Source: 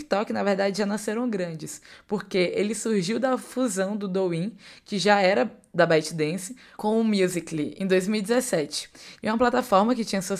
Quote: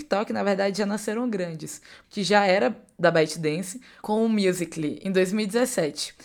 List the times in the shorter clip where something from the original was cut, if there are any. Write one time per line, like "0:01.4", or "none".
0:02.0

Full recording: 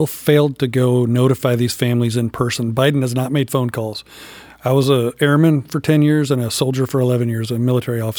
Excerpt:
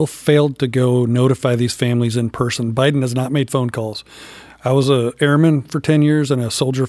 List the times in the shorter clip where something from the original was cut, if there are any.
none

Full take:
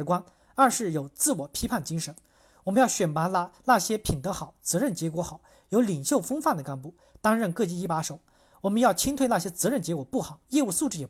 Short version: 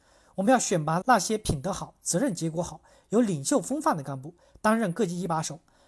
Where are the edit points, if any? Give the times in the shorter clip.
0:01.0

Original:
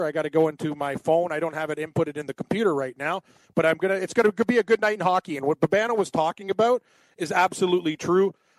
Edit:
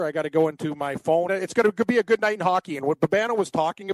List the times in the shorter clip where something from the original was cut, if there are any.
0:01.3

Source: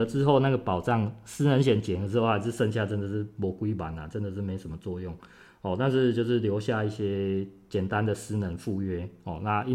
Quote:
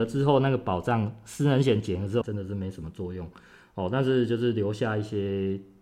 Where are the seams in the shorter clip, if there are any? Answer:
0:02.2

